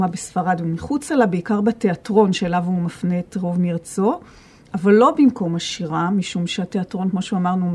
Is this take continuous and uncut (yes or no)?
yes